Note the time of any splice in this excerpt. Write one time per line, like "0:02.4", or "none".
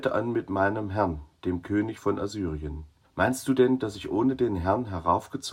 0:03.0